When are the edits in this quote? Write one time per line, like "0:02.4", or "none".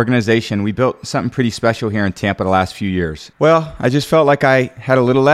0:03.3